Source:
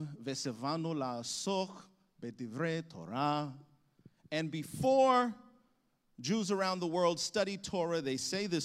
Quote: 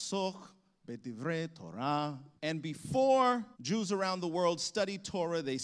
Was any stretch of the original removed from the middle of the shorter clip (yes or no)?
yes